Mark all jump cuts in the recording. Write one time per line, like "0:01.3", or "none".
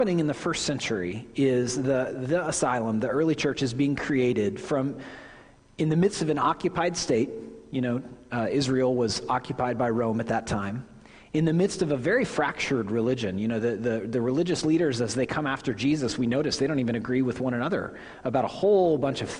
none

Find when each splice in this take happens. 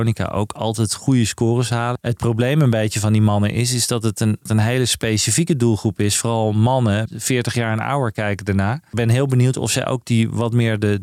none

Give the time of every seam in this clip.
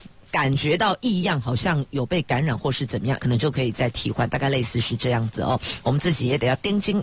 0:03.2

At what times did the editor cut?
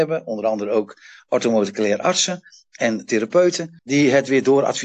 0:03.8

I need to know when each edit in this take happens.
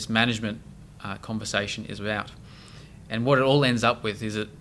none

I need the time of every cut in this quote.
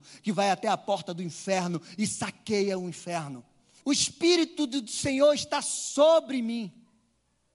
0:03.8

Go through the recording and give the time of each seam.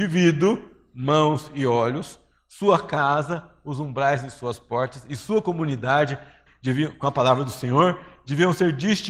0:06.5

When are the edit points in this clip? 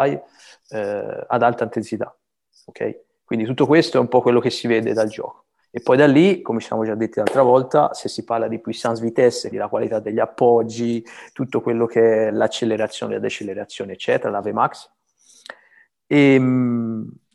0:09.5

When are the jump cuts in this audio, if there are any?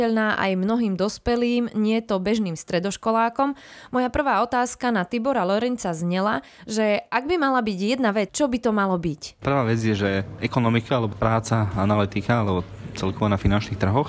0:08.3
0:09.4

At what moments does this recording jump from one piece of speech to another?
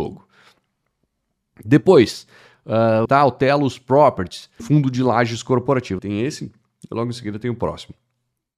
0:03.1
0:04.6
0:06.0

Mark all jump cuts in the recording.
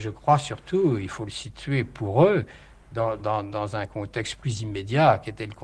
0:03.2

